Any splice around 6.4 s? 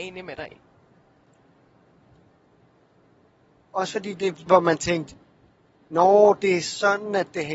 no; 1 cut; at 4.5 s

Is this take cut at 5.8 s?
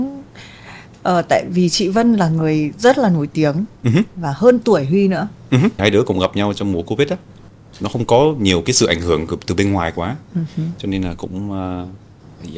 yes; 2 cuts; at 3.8 s, 5.8 s

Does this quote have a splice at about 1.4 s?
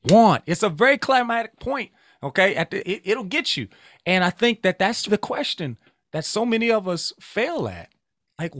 no; 2 cuts; at 2.8 s, 5.1 s

